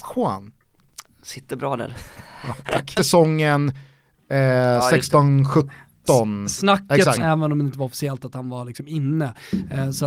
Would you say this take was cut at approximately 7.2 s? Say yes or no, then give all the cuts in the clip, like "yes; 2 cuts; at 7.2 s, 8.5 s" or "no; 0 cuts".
yes; 2 cuts; at 3.0 s, 7.2 s